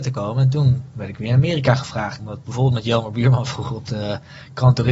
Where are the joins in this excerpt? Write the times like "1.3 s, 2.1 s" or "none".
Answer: 2.2 s